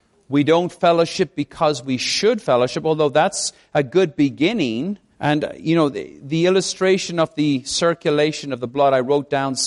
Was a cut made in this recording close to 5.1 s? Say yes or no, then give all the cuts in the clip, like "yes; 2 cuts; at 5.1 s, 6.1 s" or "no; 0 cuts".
yes; 1 cut; at 5.1 s